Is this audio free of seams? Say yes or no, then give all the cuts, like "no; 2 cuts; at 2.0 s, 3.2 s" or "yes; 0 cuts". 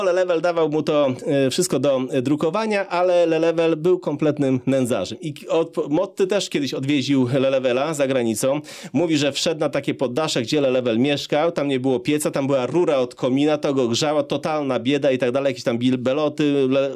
yes; 0 cuts